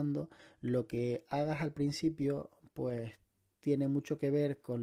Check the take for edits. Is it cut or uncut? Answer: uncut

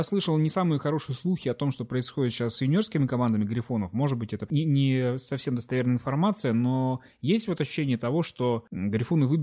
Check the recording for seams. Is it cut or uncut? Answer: cut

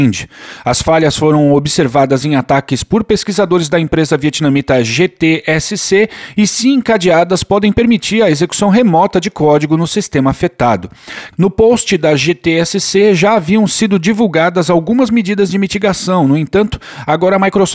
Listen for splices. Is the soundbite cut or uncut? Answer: cut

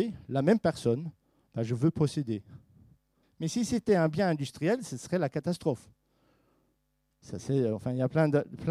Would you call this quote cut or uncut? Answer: cut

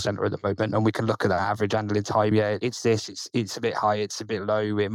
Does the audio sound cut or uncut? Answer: cut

